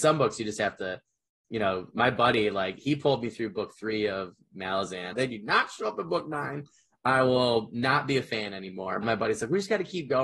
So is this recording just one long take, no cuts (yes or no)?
no